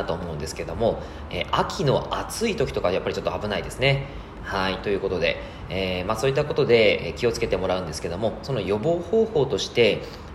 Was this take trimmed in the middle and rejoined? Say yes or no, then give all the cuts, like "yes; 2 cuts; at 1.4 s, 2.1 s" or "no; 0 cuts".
no; 0 cuts